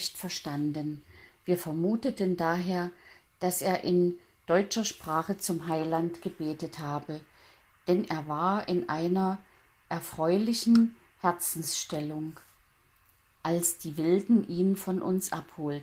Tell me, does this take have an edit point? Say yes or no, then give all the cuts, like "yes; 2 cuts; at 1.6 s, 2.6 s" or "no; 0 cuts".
no; 0 cuts